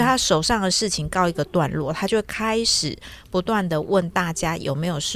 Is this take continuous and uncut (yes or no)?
yes